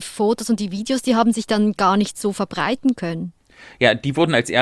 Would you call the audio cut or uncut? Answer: uncut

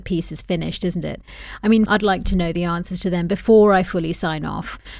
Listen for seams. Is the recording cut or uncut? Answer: cut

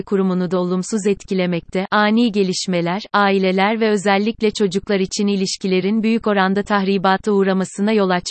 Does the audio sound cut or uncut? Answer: uncut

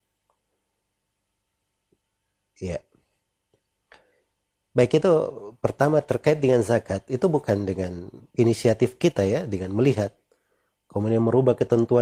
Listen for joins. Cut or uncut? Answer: uncut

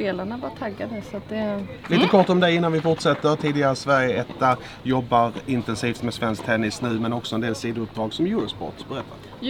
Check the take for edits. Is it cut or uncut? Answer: cut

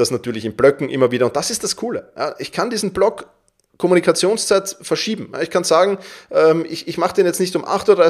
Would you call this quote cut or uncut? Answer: uncut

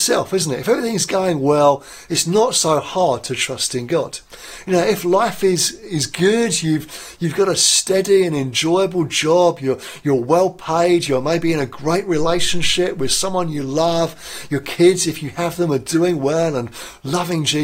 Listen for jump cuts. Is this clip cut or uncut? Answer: uncut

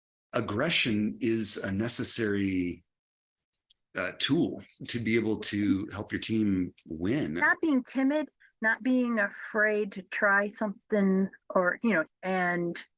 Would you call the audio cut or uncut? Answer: cut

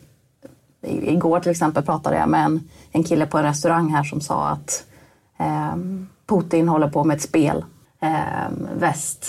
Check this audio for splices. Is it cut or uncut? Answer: cut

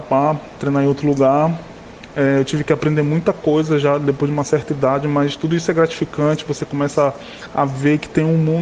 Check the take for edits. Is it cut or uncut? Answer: uncut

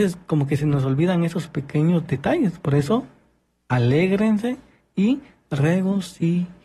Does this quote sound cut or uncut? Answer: uncut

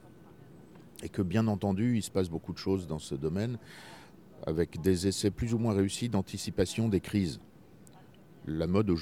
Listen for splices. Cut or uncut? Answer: uncut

